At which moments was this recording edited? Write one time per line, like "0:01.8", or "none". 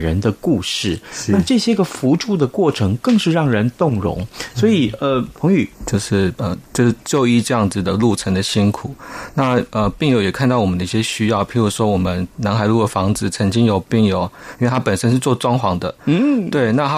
0:05.7